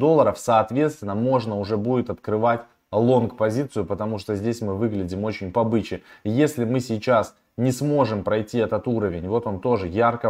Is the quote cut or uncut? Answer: uncut